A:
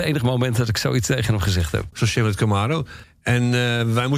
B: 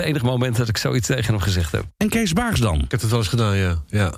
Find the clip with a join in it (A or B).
A